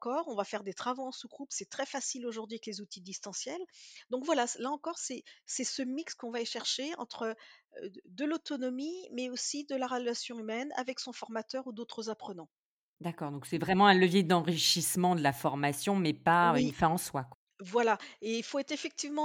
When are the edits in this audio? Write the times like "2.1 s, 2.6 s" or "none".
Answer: none